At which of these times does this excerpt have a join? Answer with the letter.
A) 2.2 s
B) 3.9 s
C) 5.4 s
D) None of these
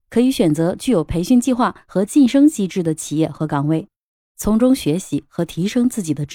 D